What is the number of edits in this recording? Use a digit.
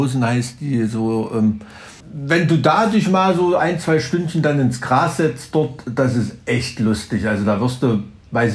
1